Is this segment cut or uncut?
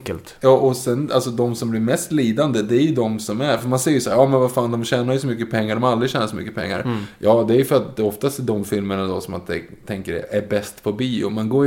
uncut